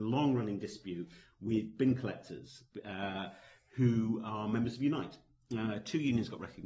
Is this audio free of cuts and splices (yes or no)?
yes